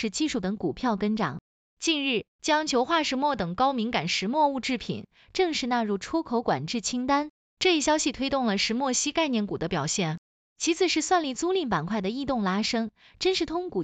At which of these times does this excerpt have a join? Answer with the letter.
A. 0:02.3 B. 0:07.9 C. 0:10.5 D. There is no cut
A